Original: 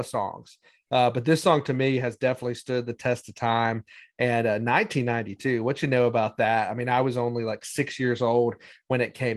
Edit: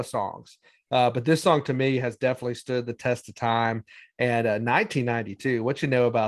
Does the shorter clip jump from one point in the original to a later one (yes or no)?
no